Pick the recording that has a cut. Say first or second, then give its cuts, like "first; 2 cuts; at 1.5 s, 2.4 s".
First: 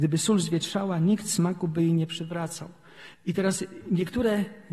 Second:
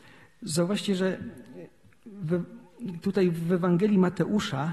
first; 1 cut; at 3.1 s